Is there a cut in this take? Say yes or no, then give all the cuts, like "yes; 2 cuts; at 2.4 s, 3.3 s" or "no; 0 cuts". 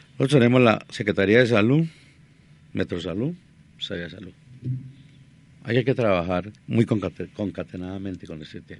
yes; 1 cut; at 6.6 s